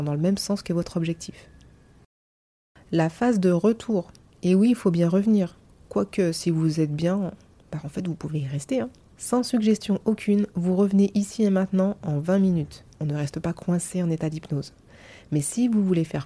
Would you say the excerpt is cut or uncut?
cut